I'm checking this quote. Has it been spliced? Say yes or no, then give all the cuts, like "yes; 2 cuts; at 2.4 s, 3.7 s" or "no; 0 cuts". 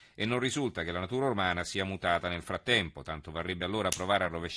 no; 0 cuts